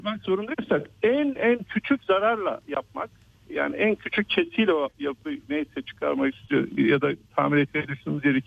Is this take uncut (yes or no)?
no